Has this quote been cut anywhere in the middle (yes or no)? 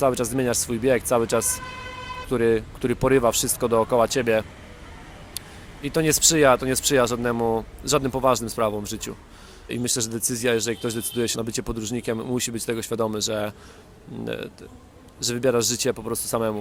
yes